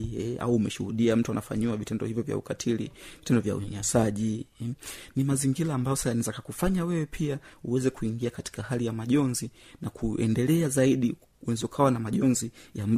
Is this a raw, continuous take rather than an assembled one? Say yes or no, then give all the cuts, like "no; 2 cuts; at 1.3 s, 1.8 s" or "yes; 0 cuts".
yes; 0 cuts